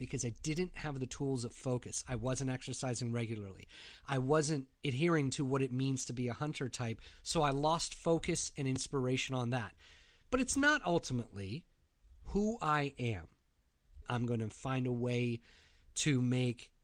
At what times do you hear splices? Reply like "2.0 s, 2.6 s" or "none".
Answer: 10.2 s, 14.0 s